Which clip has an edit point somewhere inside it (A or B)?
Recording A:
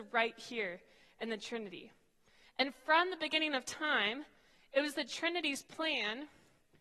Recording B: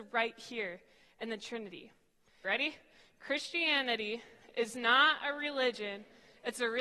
B